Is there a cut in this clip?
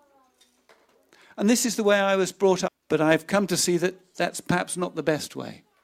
yes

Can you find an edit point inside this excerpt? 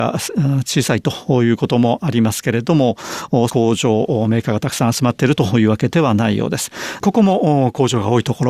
yes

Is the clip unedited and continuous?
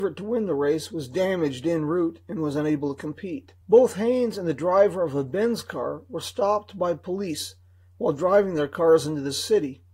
no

